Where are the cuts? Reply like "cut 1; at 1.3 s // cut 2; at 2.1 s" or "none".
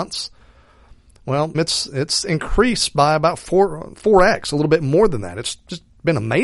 cut 1; at 1.5 s